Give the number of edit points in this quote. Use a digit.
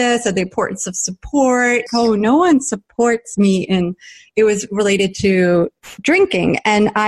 1